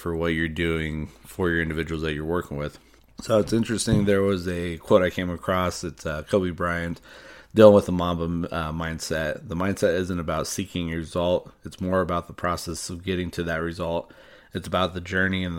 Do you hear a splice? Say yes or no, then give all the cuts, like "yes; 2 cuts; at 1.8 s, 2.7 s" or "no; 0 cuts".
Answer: no; 0 cuts